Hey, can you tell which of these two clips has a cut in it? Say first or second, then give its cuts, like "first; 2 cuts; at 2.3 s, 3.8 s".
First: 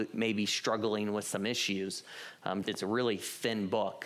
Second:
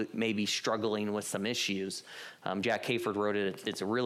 first; 1 cut; at 2.6 s